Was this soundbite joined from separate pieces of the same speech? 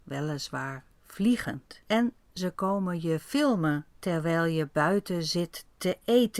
yes; 2 cuts; at 1.8 s, 3.9 s

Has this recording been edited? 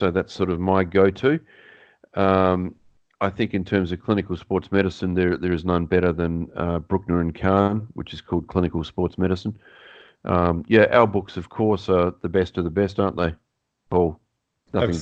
no; 0 cuts

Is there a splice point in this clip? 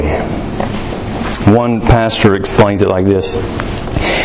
no; 0 cuts

